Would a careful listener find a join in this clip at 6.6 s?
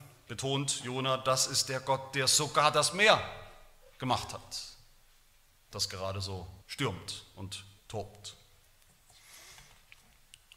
yes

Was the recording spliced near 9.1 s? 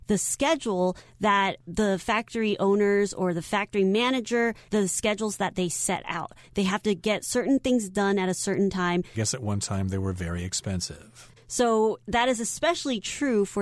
yes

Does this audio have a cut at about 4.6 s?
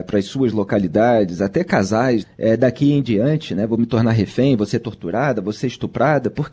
no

